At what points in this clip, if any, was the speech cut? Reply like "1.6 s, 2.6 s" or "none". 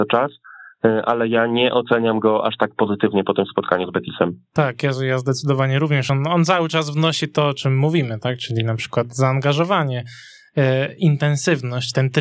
none